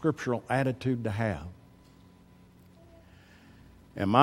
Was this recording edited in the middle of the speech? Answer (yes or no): no